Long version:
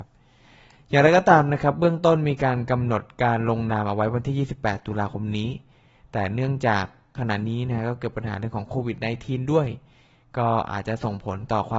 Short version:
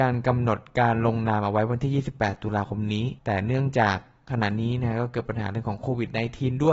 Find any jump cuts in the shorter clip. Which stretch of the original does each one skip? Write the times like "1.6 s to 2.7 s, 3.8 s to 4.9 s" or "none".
5.6 s to 6.1 s